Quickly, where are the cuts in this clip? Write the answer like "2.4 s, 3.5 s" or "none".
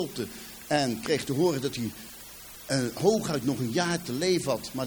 none